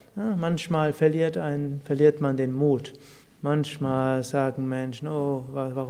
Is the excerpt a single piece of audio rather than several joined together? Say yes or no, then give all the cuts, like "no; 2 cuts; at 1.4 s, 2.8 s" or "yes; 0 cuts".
yes; 0 cuts